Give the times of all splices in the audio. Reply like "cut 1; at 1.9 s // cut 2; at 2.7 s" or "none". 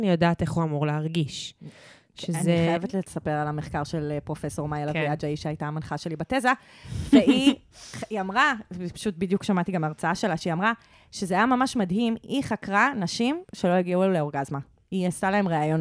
none